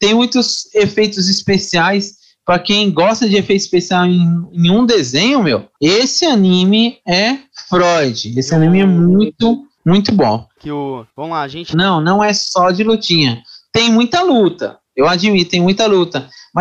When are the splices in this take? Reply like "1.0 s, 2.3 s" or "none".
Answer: 10.6 s, 11.7 s

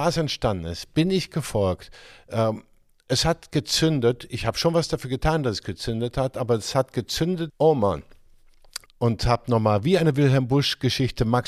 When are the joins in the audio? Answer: 7.5 s, 8.9 s

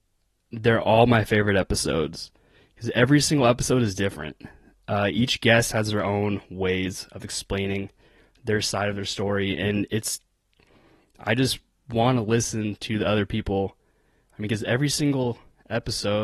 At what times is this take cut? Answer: none

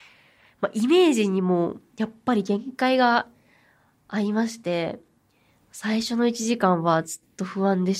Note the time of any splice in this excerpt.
none

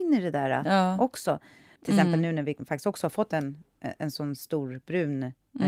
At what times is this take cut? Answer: 1.8 s

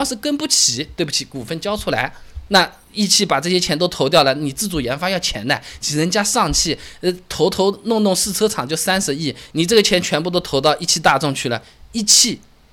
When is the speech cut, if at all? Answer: 2.5 s

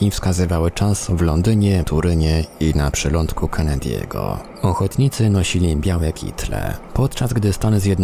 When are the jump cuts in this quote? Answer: 1.8 s

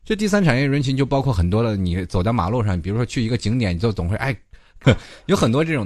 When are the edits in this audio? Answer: 4.8 s

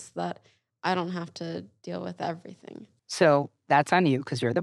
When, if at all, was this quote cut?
3.0 s

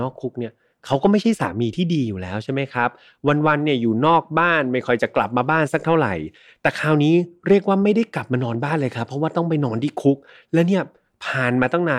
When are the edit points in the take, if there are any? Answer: none

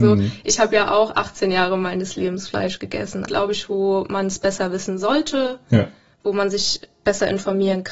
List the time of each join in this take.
3.3 s

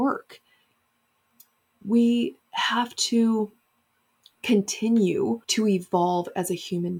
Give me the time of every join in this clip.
2.4 s, 5.4 s

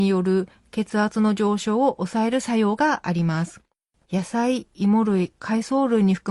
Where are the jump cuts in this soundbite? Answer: 4.0 s

